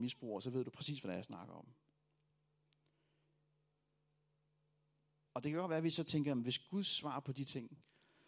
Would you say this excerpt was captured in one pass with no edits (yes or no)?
no